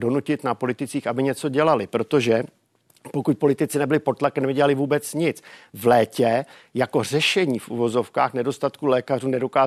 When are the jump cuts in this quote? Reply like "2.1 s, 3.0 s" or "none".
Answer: none